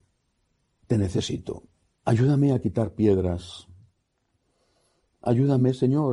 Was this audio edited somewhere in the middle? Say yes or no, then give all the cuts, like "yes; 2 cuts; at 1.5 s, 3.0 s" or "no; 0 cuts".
yes; 1 cut; at 2.0 s